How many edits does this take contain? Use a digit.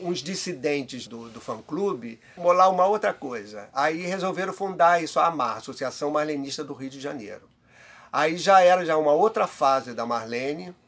2